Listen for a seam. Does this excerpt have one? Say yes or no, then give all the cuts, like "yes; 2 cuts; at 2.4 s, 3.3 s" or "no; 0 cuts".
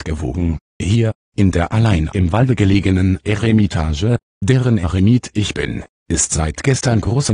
no; 0 cuts